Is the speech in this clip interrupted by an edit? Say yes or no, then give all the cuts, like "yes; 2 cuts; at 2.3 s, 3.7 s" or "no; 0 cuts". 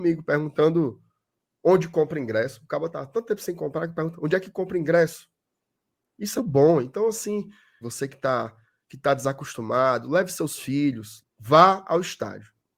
yes; 3 cuts; at 6.4 s, 7.8 s, 11.2 s